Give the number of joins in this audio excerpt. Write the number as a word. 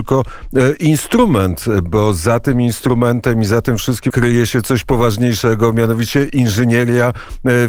one